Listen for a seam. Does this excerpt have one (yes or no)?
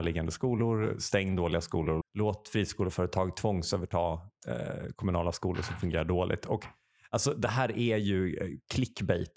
yes